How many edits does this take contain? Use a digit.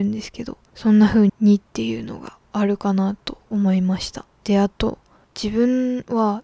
3